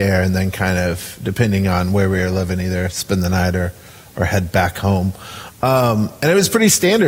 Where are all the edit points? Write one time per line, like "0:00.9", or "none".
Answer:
none